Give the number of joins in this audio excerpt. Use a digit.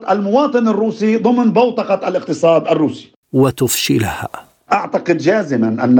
1